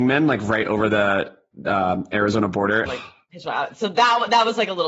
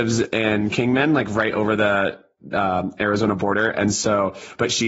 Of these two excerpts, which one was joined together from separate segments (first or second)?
first